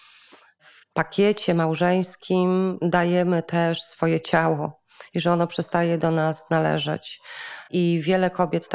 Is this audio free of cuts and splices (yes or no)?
yes